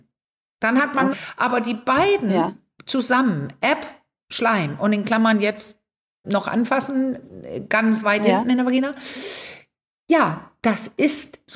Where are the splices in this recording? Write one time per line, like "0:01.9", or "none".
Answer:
0:01.1
0:06.2